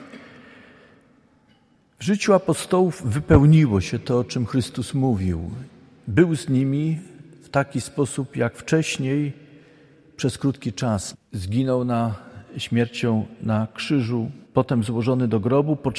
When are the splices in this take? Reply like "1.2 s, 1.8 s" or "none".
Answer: 11.1 s, 14.4 s

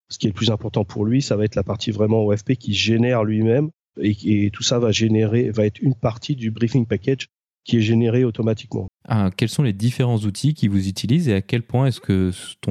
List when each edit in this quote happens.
3.9 s, 8.9 s

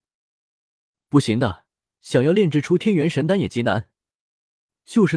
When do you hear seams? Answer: 1.9 s

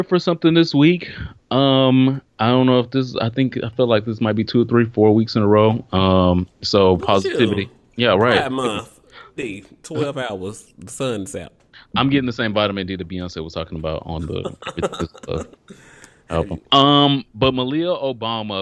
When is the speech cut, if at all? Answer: 9.4 s, 16.6 s

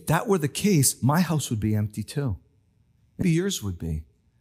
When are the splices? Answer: 3.2 s

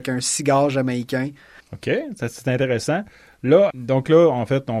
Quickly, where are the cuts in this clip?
1.6 s, 3.7 s

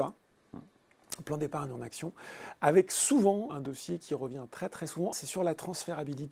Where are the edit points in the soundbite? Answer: 3.5 s, 5.1 s

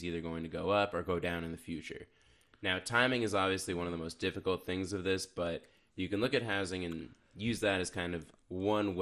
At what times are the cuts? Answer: none

